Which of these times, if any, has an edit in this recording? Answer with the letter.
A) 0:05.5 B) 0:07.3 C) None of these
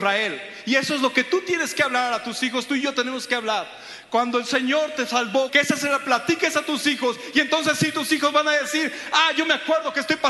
A